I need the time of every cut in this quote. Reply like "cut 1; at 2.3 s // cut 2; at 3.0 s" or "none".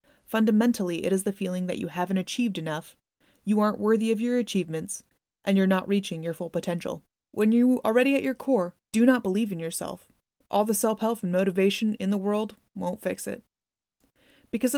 cut 1; at 7.3 s // cut 2; at 8.8 s